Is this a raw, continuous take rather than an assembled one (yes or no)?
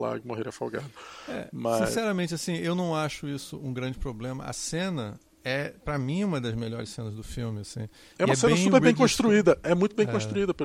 yes